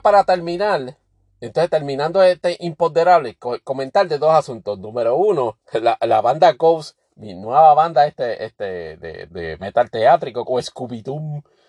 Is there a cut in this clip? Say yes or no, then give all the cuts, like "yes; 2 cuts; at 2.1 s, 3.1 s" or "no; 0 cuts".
yes; 2 cuts; at 9.3 s, 10.4 s